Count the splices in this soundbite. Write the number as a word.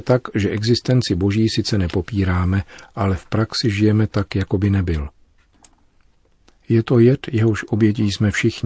zero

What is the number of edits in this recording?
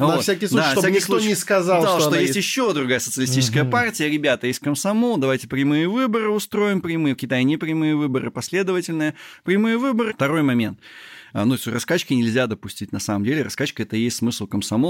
one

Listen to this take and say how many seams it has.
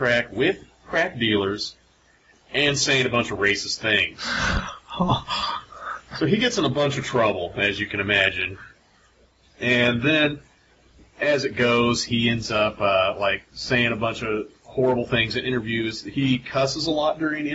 zero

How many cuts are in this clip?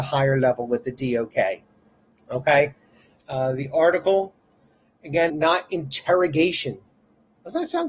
two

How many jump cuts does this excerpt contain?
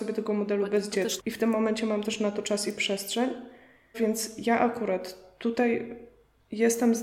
two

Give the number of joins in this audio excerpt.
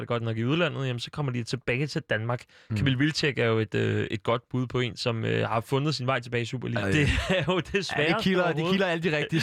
one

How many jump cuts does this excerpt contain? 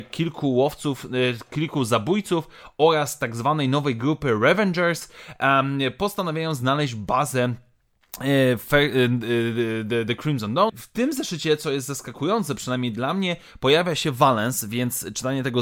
one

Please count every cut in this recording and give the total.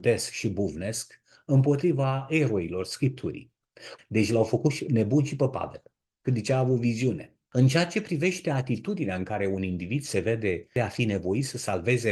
one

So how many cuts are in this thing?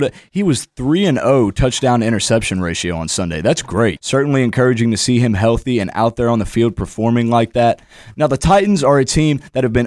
one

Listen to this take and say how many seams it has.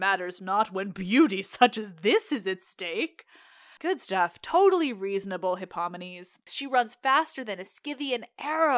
two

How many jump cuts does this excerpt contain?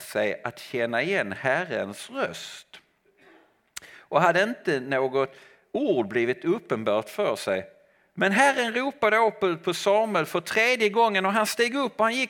zero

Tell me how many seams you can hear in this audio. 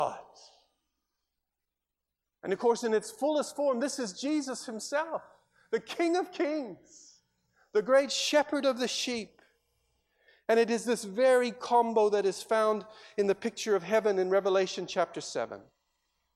zero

